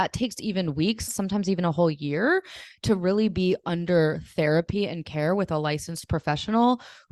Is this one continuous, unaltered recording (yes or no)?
no